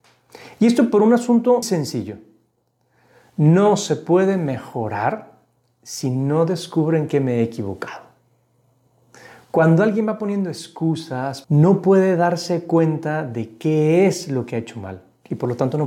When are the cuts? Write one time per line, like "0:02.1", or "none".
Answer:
0:01.6
0:11.4